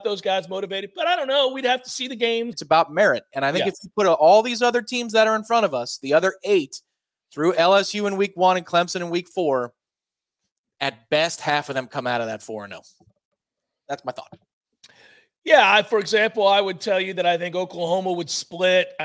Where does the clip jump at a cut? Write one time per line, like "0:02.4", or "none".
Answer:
0:02.5

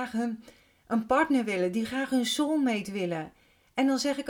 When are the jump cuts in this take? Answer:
none

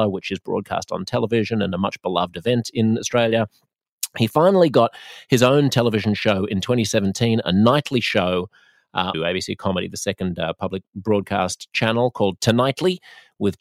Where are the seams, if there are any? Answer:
0:09.1

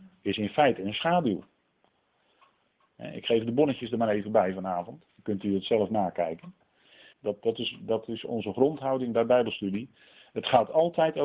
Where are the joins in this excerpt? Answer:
0:02.8
0:05.1
0:07.1

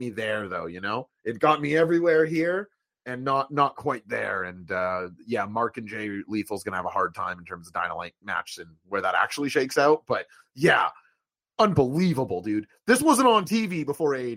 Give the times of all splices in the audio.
none

